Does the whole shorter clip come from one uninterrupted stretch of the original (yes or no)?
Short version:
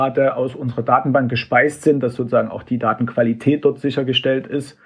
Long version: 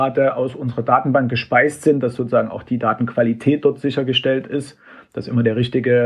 yes